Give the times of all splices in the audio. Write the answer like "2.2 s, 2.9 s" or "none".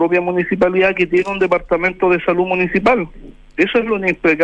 none

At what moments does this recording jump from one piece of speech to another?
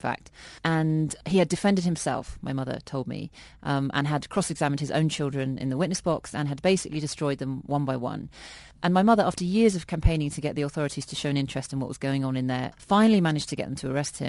8.7 s, 12.7 s

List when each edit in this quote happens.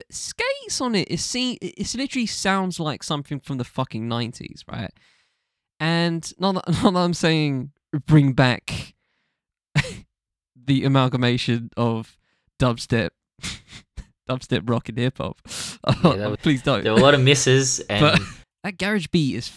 16.4 s, 18.4 s

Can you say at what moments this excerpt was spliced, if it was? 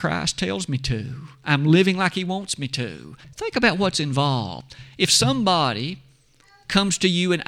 3.2 s

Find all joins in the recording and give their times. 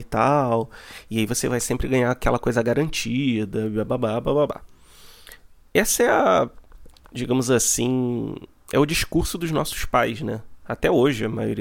none

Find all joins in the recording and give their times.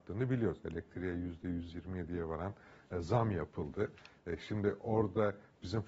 none

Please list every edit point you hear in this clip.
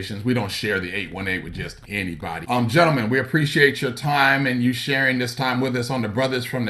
2.4 s

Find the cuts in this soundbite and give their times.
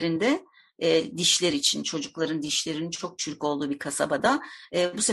none

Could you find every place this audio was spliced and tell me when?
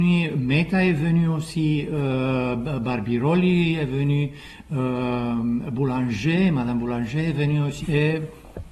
7.8 s

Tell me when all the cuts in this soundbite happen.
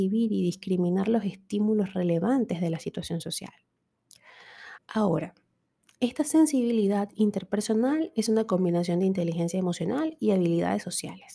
4.8 s

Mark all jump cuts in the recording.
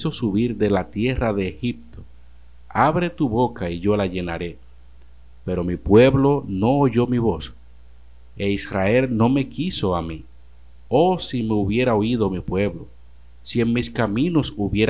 10.9 s

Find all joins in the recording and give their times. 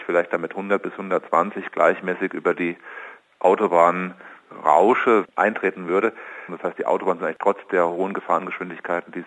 5.2 s, 6.5 s

